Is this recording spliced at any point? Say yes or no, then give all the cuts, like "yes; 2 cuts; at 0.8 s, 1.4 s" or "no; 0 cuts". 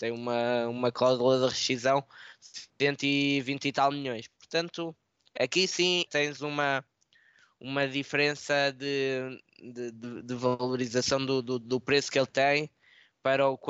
yes; 1 cut; at 6.1 s